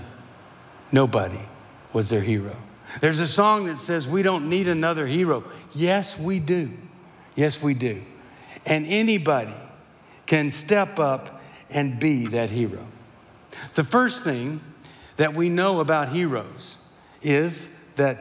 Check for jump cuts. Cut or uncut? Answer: uncut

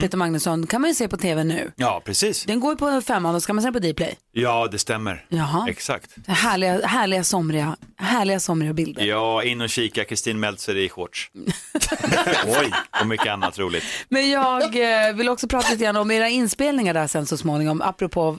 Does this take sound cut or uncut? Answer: uncut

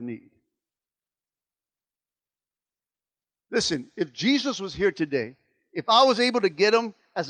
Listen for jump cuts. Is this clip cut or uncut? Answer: uncut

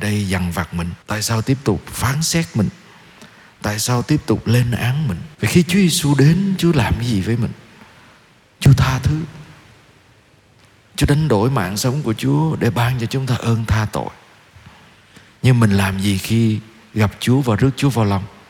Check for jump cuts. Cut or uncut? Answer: cut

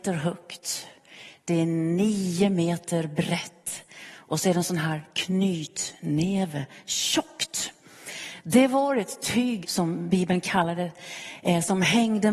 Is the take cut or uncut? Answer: cut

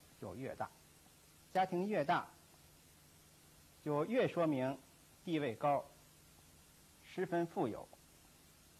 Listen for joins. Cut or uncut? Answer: cut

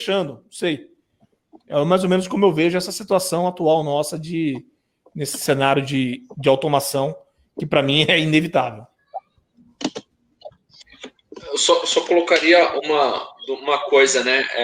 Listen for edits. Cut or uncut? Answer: uncut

